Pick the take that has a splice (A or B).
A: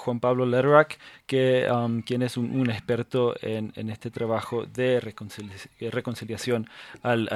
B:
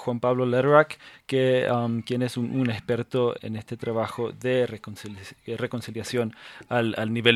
B